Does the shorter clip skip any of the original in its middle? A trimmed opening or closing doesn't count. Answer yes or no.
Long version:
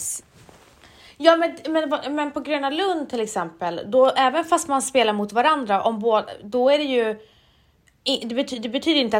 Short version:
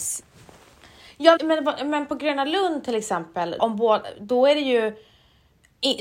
yes